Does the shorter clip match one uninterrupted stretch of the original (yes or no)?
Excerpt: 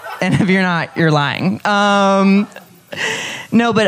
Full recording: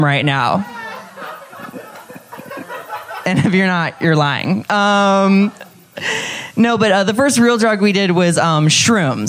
yes